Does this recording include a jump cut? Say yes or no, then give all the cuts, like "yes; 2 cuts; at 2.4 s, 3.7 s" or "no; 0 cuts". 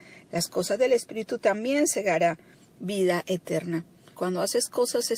yes; 1 cut; at 4.1 s